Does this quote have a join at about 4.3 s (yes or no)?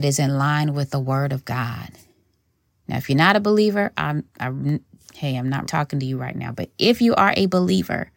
no